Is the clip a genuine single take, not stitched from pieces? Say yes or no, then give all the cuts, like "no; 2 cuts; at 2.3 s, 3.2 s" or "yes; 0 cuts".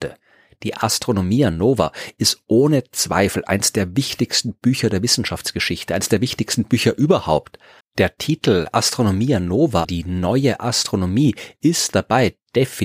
no; 2 cuts; at 7.8 s, 9.8 s